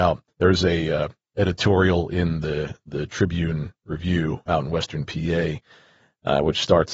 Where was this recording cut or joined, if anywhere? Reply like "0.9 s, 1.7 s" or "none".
none